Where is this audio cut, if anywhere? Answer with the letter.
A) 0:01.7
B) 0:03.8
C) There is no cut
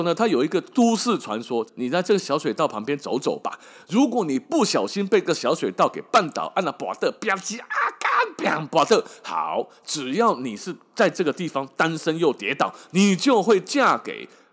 A